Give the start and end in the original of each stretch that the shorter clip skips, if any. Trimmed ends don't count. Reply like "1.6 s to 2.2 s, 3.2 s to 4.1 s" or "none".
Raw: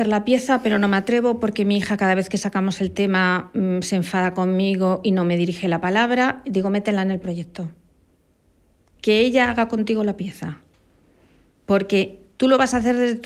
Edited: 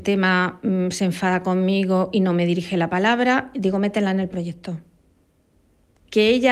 none